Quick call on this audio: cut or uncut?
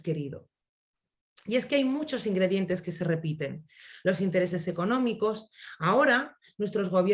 uncut